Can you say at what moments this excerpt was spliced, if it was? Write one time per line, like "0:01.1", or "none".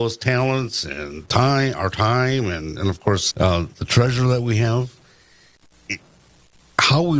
0:03.3

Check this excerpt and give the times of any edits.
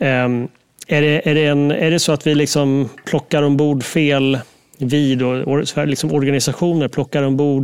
none

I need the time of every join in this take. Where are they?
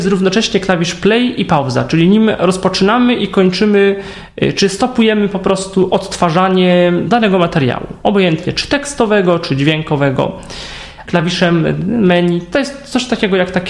0:07.1
0:11.0

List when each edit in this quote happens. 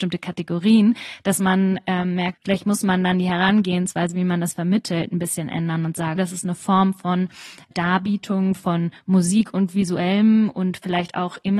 0:02.3
0:06.2
0:07.7

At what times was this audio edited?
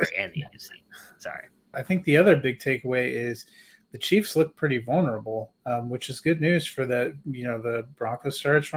0:01.7

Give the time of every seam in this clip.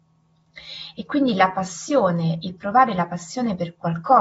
none

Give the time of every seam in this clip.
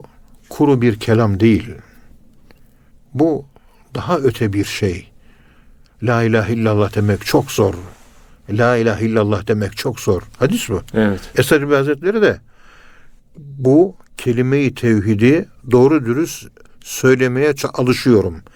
none

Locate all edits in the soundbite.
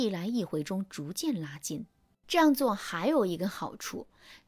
0:02.1

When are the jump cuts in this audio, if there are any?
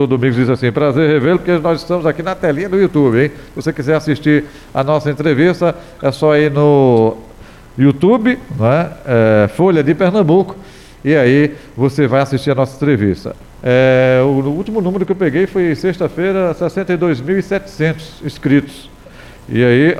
0:13.5

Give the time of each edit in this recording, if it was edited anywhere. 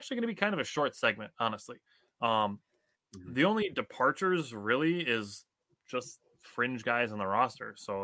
none

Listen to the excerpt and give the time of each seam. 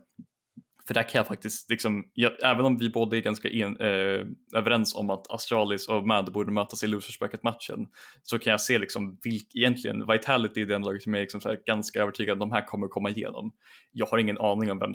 none

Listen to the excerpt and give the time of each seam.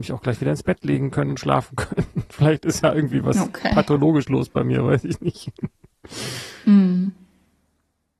none

